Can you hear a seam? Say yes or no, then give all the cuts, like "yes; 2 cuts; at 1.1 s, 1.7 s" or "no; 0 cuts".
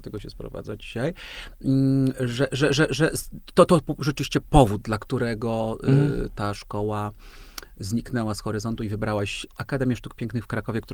no; 0 cuts